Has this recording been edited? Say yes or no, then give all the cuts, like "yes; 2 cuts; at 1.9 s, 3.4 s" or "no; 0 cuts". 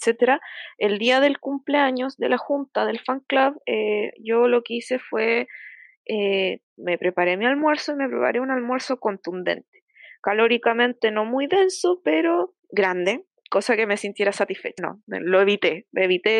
yes; 2 cuts; at 12.6 s, 14.8 s